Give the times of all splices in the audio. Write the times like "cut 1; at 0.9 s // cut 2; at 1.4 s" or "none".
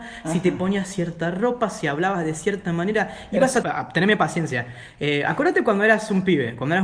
cut 1; at 3.6 s